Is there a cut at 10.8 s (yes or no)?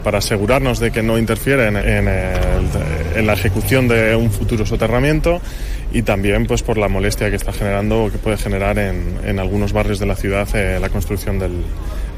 no